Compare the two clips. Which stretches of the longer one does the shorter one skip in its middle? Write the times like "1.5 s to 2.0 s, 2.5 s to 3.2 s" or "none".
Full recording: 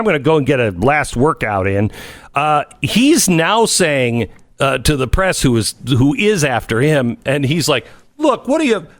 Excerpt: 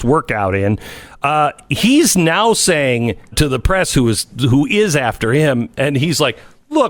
4.4 s to 4.8 s